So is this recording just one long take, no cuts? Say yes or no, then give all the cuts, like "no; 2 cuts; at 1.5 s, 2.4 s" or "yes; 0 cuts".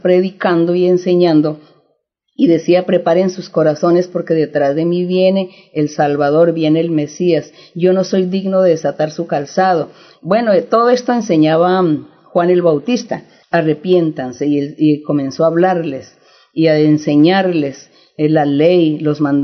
no; 2 cuts; at 10.2 s, 13.4 s